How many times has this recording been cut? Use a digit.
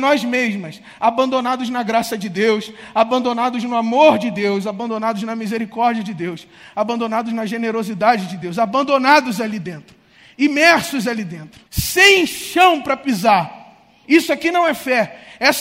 2